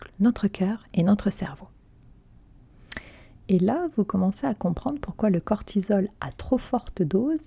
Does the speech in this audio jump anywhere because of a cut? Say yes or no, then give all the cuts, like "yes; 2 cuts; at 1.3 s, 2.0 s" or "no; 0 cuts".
no; 0 cuts